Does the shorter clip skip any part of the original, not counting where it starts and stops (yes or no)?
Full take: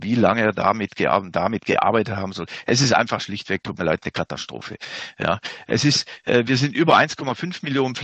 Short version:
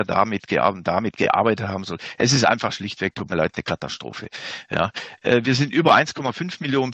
yes